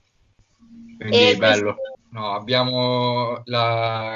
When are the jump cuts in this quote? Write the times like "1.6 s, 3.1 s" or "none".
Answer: 1.9 s

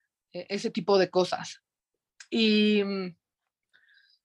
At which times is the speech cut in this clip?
none

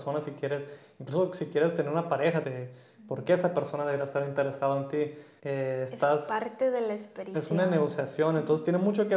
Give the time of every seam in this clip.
2.4 s, 5.4 s, 7.3 s

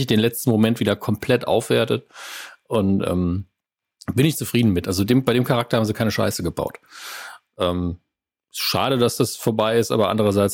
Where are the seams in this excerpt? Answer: none

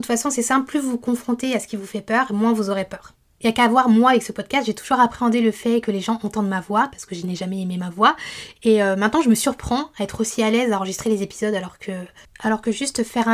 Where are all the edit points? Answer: none

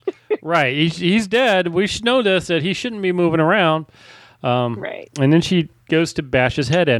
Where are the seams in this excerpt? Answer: none

